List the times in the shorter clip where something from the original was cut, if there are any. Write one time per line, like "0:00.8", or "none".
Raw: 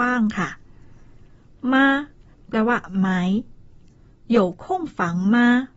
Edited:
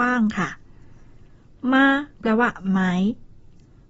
0:02.1